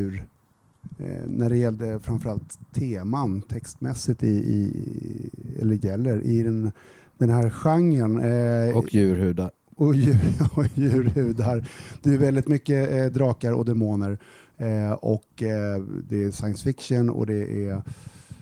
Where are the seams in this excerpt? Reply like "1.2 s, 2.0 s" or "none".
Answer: none